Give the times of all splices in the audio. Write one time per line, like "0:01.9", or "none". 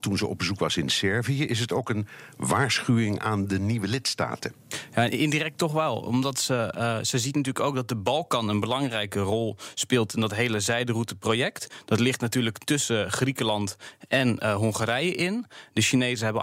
none

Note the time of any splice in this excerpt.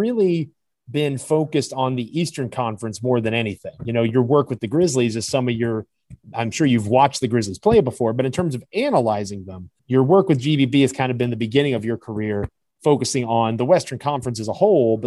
0:06.2
0:09.8

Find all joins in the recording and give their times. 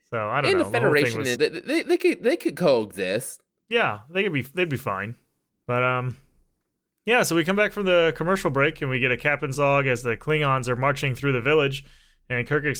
0:01.3

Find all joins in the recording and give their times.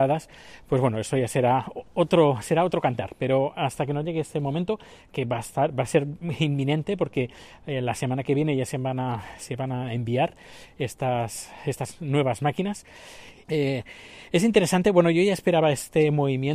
0:13.5

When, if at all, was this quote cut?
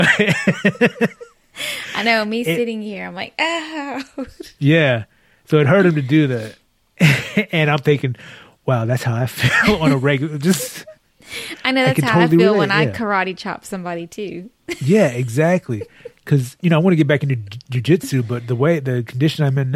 none

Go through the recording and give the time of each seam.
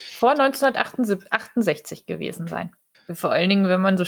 0:02.9

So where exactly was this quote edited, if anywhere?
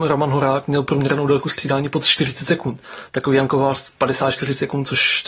none

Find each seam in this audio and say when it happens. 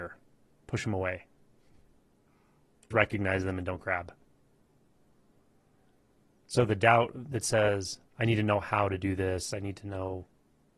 0:02.9

